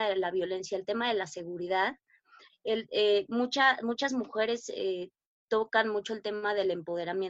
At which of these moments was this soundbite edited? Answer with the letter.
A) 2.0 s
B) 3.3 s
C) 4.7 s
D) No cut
D